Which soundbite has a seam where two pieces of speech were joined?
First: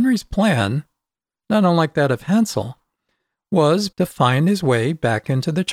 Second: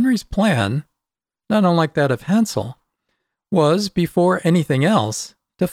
first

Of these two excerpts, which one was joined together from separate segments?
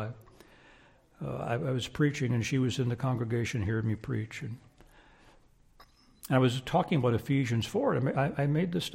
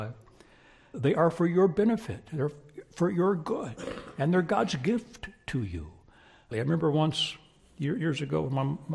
second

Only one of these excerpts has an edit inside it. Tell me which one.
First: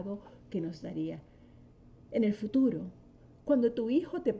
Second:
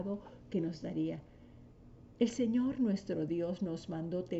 first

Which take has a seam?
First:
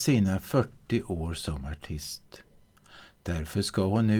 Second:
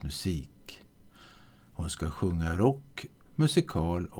second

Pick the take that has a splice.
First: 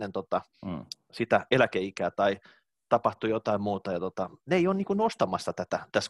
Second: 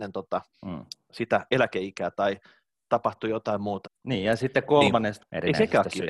second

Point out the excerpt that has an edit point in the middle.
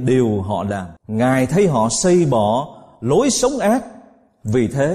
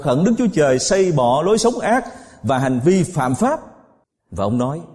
first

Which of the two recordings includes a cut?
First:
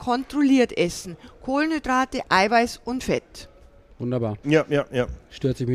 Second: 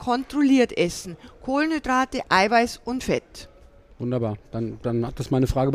first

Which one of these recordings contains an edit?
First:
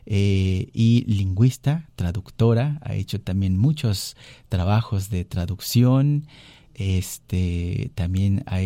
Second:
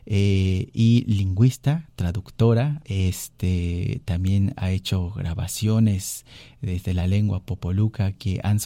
second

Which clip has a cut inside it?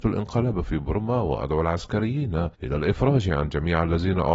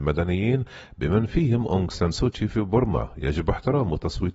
first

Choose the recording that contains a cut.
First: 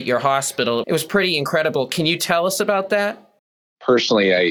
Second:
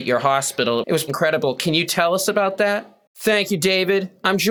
second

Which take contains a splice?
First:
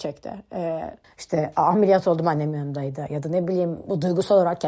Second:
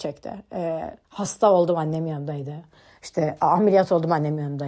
first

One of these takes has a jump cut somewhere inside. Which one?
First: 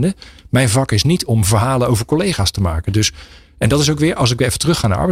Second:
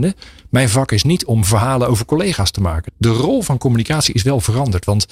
second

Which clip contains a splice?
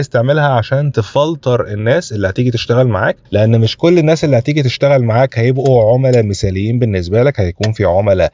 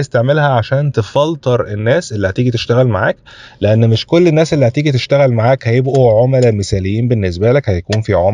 first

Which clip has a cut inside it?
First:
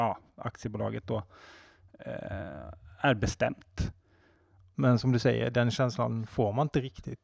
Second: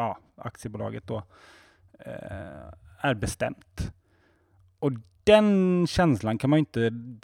first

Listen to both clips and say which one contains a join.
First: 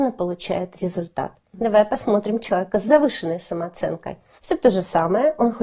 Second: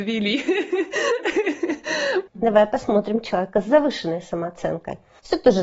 second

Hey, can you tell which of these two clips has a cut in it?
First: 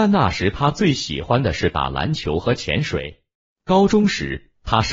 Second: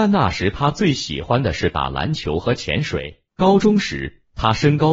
second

